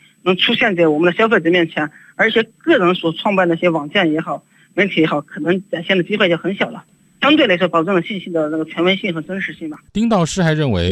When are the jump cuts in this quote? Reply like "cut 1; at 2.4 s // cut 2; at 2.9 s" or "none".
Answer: cut 1; at 9.9 s